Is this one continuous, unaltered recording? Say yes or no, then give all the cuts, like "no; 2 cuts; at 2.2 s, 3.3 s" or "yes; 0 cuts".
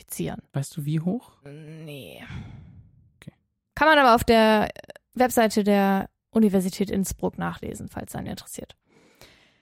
no; 1 cut; at 1.4 s